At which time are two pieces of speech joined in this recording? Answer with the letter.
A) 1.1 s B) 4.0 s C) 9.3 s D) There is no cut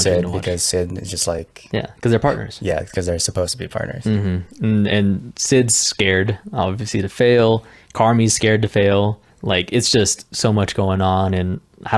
C